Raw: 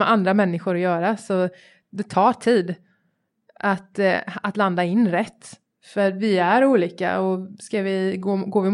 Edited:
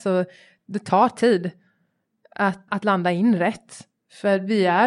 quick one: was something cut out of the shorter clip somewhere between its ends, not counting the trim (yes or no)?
yes